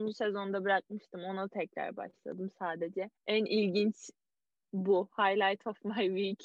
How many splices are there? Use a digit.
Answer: 1